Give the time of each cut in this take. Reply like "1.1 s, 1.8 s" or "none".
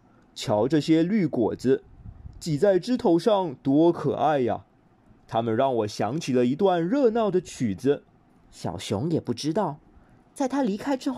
8.3 s